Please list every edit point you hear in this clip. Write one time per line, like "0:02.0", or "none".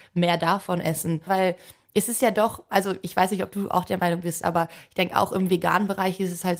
0:01.3

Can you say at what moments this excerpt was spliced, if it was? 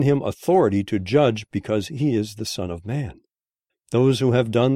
0:03.7

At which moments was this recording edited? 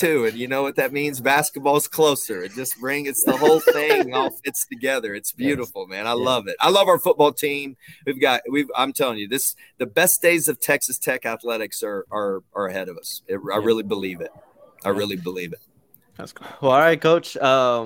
none

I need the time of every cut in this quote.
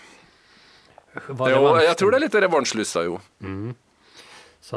0:01.3
0:03.3

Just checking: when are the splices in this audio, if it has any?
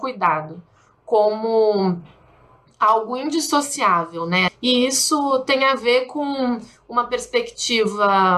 0:04.5

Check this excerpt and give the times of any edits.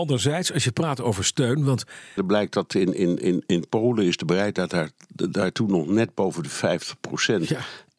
0:02.2

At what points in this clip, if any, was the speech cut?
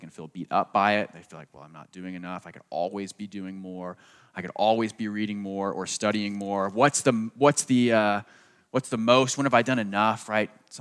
none

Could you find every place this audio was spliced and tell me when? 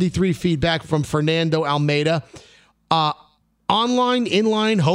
none

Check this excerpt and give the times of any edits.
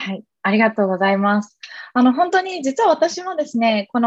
none

